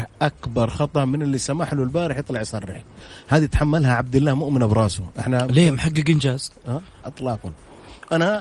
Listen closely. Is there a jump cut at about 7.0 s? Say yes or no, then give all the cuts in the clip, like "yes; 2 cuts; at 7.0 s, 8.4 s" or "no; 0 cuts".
yes; 1 cut; at 7.0 s